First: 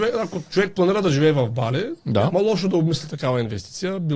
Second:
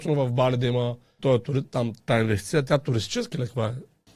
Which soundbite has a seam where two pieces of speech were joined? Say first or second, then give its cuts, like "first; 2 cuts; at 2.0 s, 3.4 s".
second; 1 cut; at 1.2 s